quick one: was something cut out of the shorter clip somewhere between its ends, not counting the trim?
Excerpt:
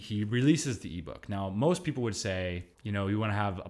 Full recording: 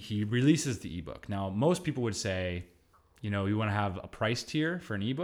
yes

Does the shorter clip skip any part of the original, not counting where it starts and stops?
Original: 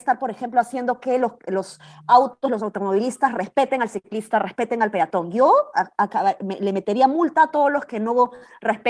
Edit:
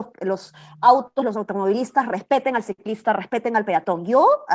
no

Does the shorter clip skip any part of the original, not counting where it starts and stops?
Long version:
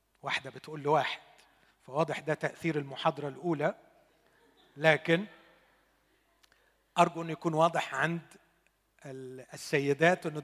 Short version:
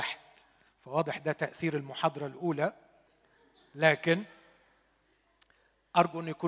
no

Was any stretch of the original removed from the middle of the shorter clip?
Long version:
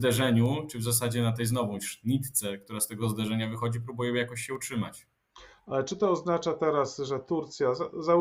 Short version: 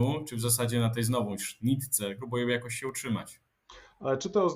yes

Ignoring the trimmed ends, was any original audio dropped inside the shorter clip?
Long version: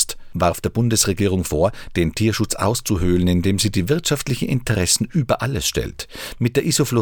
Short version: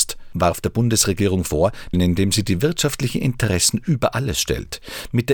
yes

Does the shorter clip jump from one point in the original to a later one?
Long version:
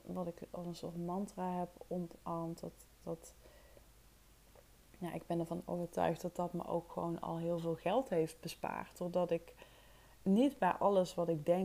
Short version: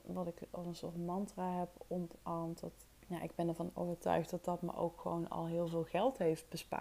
yes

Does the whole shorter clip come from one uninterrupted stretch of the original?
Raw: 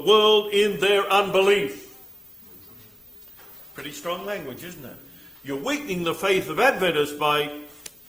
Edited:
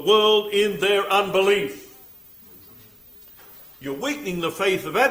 no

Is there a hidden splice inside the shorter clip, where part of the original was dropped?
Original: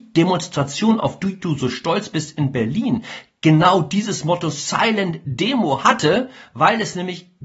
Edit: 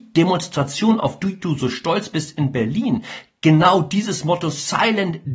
no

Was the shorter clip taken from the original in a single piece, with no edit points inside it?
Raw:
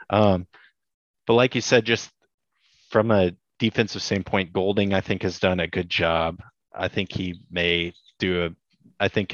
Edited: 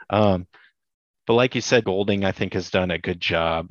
no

